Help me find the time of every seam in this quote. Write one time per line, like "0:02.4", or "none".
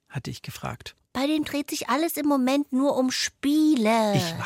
0:01.1